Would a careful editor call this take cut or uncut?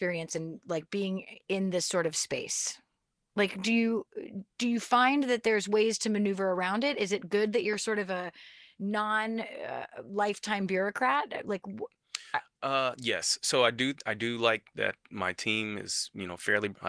uncut